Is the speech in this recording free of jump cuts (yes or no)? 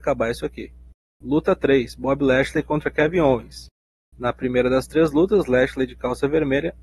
yes